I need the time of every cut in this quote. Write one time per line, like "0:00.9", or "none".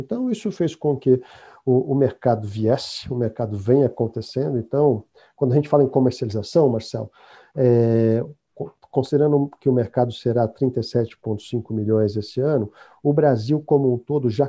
none